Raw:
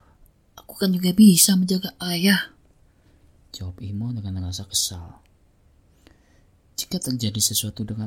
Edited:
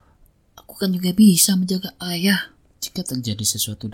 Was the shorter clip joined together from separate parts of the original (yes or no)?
yes